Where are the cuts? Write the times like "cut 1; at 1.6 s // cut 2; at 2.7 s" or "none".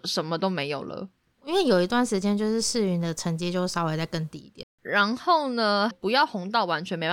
cut 1; at 4.6 s // cut 2; at 5.9 s